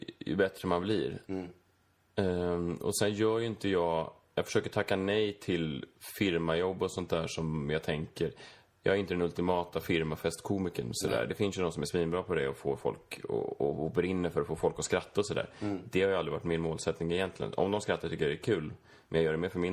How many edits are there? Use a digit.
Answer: 0